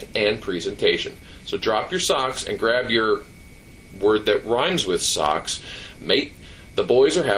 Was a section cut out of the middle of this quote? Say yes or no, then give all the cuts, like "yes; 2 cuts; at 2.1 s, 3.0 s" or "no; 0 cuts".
no; 0 cuts